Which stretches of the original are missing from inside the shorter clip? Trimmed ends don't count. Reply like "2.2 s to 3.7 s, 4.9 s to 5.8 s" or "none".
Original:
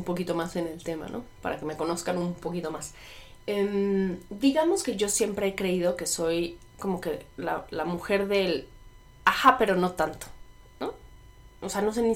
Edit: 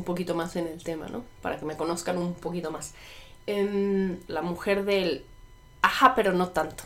4.3 s to 7.7 s